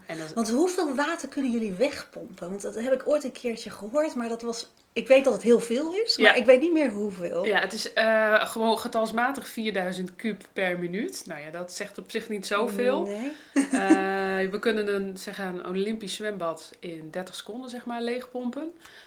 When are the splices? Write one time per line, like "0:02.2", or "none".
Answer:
none